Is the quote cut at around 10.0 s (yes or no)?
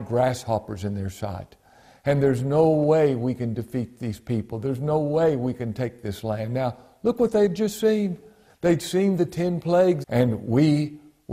yes